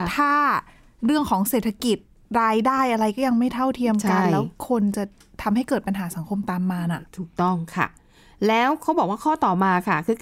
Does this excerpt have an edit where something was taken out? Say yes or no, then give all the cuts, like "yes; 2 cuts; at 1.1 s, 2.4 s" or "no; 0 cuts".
no; 0 cuts